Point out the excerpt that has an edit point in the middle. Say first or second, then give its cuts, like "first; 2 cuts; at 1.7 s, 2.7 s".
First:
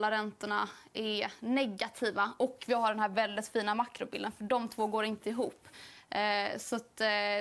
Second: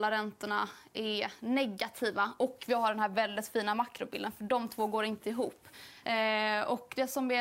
second; 1 cut; at 6.0 s